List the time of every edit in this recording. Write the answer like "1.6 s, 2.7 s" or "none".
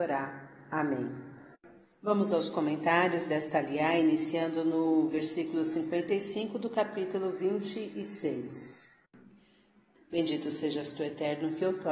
10.0 s